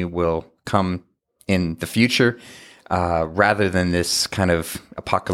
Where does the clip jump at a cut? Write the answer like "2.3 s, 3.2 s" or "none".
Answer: none